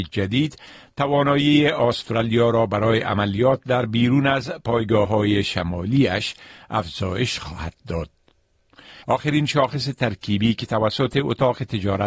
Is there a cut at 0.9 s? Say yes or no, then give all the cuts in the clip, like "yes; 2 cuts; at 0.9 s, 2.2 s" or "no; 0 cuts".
no; 1 cut; at 9.0 s